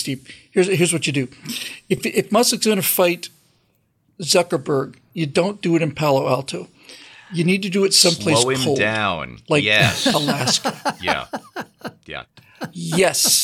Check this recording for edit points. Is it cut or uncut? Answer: uncut